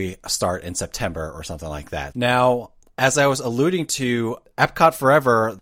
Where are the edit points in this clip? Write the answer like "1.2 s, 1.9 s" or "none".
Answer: 2.1 s